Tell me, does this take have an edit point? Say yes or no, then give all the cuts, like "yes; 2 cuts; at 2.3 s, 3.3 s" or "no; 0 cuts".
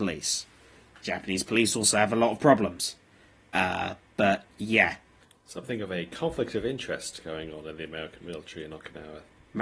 no; 0 cuts